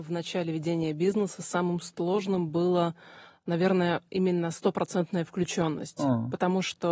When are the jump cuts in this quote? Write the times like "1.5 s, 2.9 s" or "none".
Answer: none

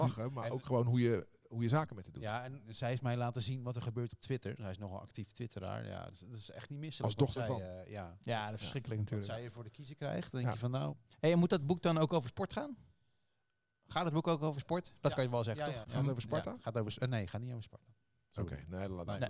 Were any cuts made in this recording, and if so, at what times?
15.8 s

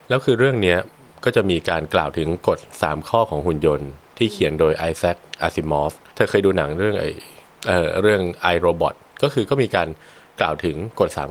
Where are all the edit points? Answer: none

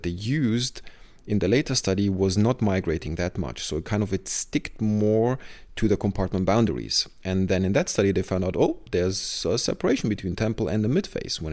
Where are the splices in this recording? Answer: none

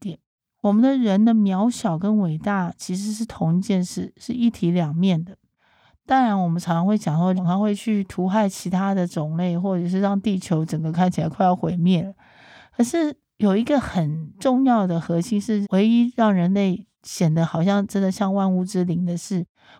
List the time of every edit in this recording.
7.4 s, 15.6 s

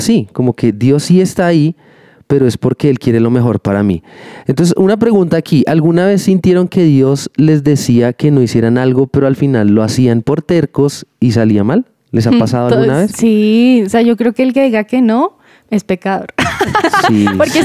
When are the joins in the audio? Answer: none

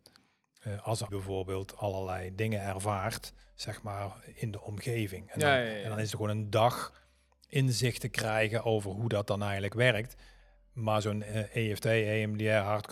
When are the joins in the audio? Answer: 1.1 s

